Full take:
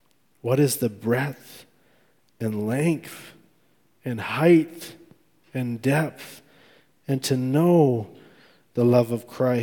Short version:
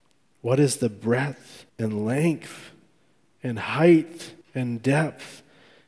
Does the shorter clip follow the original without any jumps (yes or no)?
no